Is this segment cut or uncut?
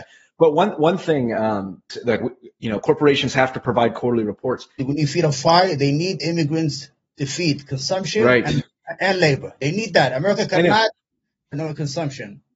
cut